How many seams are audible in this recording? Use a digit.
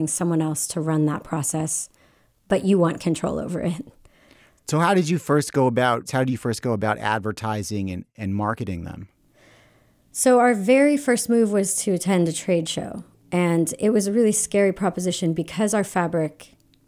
1